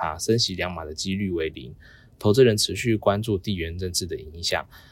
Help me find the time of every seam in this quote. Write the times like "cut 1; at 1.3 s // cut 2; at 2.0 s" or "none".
none